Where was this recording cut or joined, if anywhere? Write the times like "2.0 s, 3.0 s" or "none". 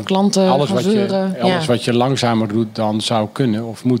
none